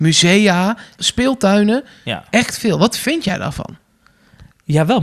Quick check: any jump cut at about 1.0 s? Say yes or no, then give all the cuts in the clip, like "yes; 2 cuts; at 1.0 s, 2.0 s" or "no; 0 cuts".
yes; 1 cut; at 1.0 s